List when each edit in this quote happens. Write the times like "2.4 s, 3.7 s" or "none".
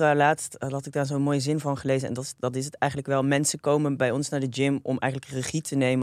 none